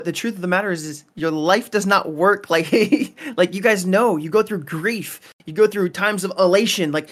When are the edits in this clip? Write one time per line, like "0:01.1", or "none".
none